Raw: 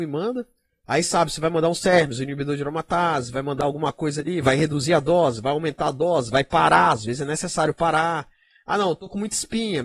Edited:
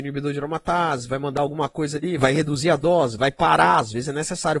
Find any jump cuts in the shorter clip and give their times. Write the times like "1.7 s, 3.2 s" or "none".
3.2 s